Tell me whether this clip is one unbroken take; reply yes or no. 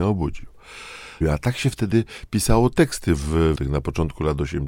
no